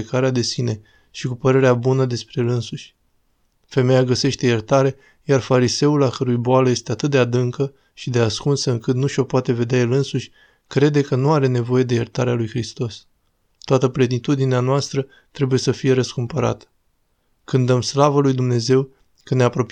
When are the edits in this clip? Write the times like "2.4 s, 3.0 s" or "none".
13.5 s